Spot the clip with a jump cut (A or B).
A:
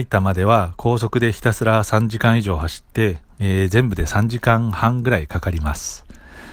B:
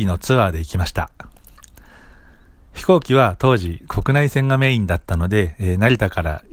B